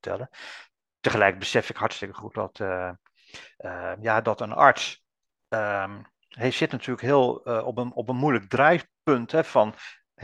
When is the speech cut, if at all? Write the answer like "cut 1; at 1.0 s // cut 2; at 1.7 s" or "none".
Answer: none